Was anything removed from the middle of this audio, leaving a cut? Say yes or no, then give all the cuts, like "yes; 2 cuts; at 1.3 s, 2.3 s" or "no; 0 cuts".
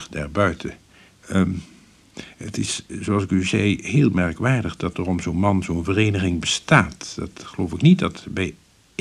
no; 0 cuts